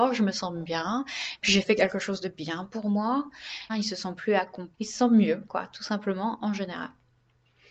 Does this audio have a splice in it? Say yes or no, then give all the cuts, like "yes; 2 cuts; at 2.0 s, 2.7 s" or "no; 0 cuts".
yes; 2 cuts; at 3.7 s, 4.7 s